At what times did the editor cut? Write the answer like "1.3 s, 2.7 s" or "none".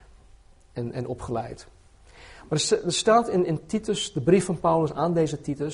none